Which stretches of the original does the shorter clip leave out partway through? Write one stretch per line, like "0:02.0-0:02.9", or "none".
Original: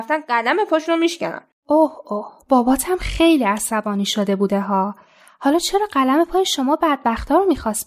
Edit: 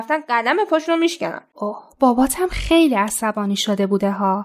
0:01.5-0:02.0